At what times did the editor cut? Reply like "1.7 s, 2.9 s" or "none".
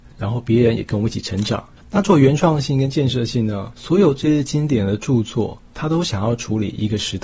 1.8 s, 3.7 s